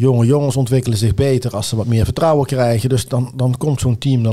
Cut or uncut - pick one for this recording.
cut